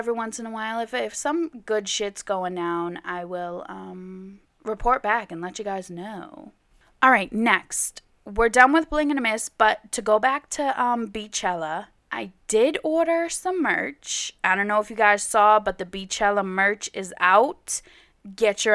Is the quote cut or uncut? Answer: uncut